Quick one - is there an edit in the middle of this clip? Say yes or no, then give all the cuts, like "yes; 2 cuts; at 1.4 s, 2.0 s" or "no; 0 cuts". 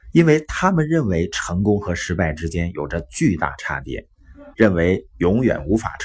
yes; 1 cut; at 4.5 s